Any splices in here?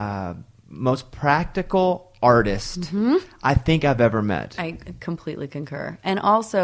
no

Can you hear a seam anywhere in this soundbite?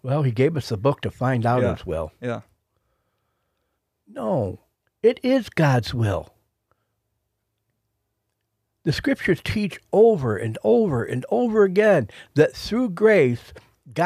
no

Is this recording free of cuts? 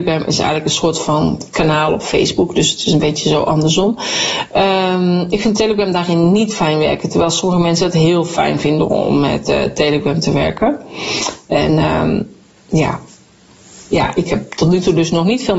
no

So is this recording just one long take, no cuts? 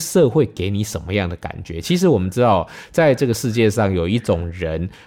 yes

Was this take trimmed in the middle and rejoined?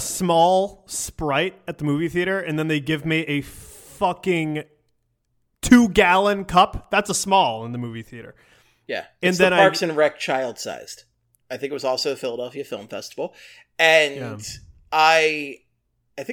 yes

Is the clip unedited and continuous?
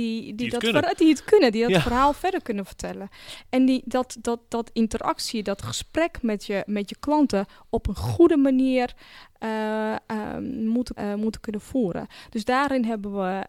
no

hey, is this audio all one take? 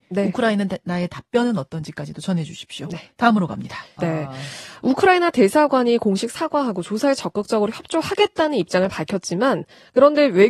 no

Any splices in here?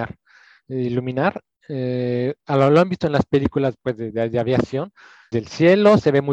yes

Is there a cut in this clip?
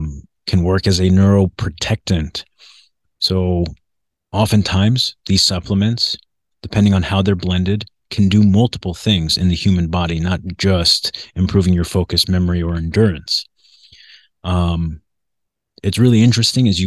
no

